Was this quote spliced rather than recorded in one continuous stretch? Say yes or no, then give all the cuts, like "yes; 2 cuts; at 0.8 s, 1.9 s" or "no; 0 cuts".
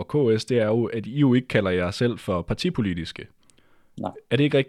no; 0 cuts